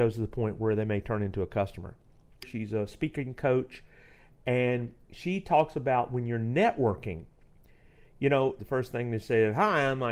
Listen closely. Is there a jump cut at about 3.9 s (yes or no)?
no